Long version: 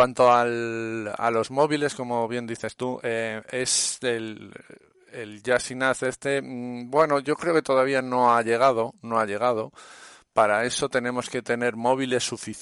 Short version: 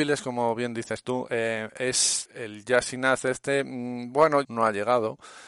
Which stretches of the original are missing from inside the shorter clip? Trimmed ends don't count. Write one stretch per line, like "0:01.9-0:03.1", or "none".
0:04.0-0:05.0
0:07.2-0:09.0